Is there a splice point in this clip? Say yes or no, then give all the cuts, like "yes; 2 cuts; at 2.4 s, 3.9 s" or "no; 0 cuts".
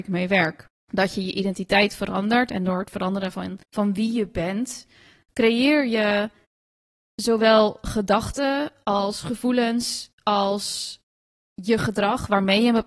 no; 0 cuts